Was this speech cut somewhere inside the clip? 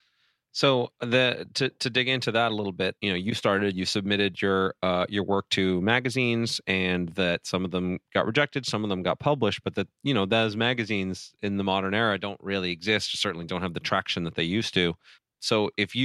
yes; 1 cut; at 3.0 s

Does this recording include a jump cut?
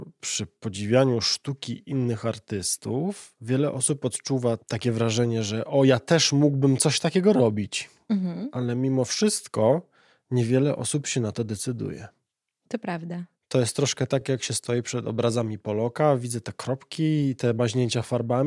no; 0 cuts

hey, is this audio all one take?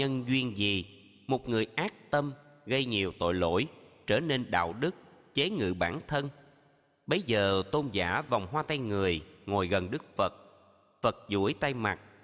yes; 0 cuts

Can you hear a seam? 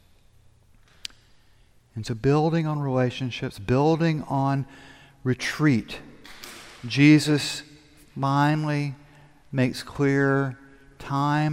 no; 0 cuts

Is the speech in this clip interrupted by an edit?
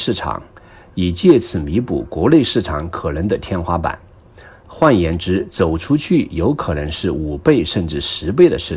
no; 0 cuts

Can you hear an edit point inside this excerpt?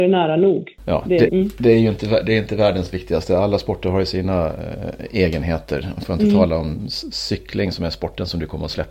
yes; 1 cut; at 1.3 s

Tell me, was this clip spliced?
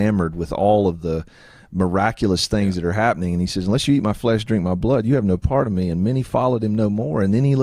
no; 0 cuts

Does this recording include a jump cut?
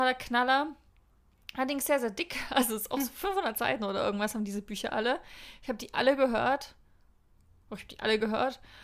no; 0 cuts

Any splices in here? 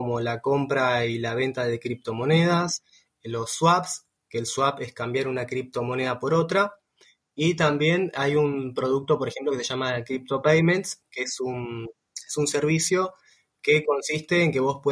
no; 0 cuts

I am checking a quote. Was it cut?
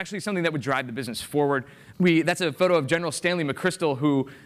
yes; 1 cut; at 1.9 s

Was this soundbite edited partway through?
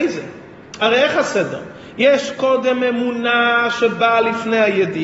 no; 0 cuts

